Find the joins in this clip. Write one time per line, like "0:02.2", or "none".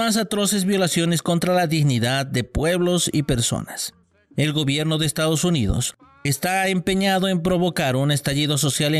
none